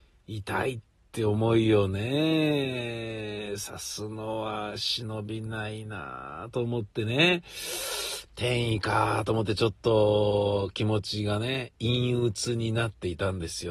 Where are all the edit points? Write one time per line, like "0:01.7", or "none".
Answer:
none